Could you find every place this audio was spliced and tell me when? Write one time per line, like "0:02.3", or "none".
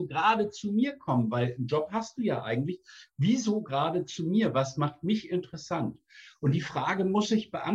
none